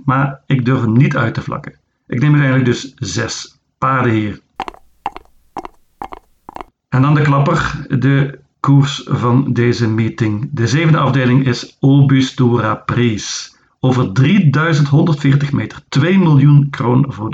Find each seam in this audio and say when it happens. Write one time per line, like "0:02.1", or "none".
none